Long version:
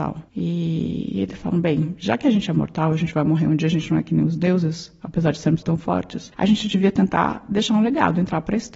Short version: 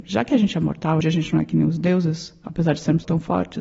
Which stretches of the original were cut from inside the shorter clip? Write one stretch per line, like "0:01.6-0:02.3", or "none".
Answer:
0:02.9-0:03.6

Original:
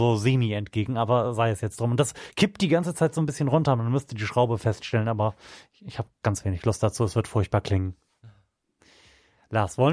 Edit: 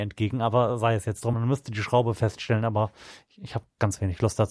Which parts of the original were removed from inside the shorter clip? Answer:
0:01.9-0:03.8

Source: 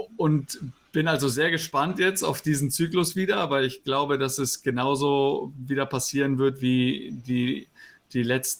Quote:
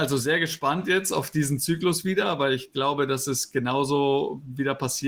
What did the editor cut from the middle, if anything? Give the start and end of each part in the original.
none

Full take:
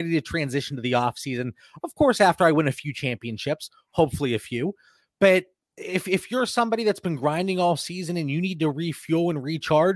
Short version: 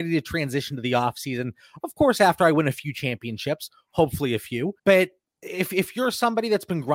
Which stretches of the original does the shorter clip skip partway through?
0:04.8-0:05.1

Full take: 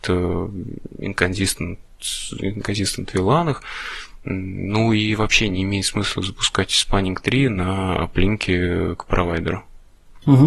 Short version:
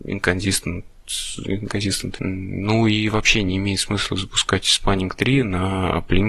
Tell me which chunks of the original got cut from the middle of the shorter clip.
0:03.1-0:04.2

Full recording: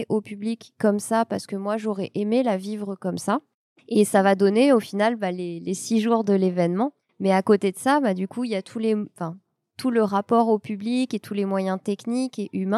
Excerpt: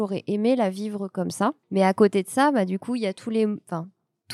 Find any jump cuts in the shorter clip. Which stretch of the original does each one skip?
0:03.5-0:07.1

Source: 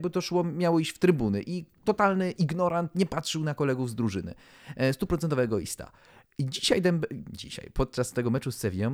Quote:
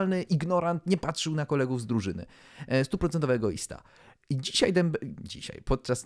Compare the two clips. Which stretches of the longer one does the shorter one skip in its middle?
none

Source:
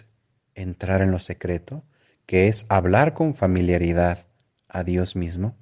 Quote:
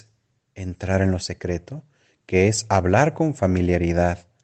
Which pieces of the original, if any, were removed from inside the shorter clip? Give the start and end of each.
none

